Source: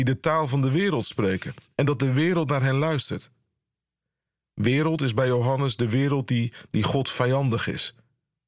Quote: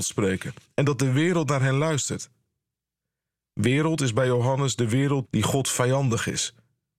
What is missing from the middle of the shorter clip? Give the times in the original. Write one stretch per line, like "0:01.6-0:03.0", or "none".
0:06.3-0:06.7

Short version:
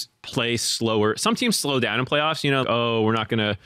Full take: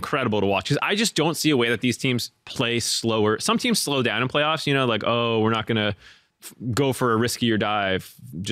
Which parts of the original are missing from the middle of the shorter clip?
0:04.9-0:05.0

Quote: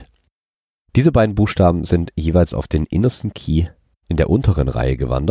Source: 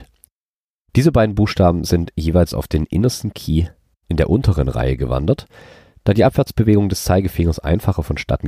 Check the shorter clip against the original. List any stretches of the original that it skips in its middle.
none

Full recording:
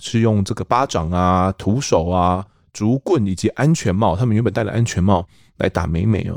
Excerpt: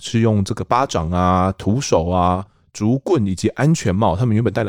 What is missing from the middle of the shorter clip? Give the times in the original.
none

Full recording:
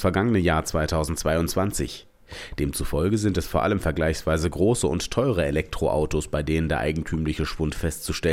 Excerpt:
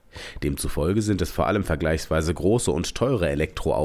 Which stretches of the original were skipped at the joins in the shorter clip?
none

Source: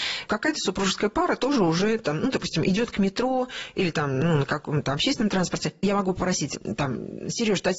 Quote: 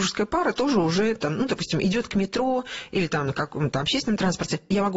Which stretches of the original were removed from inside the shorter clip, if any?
0:04.1-0:04.4

